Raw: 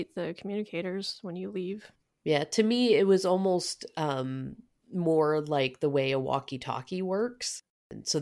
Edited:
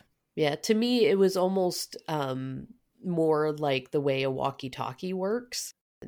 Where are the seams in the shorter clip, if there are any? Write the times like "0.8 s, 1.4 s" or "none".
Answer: none